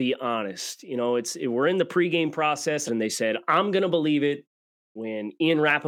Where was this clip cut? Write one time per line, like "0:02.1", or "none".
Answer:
0:02.9